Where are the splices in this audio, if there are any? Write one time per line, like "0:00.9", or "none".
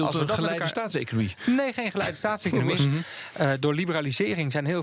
0:02.8